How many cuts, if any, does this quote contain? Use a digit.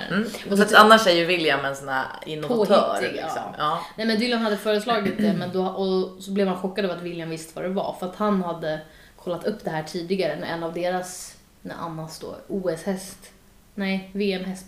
1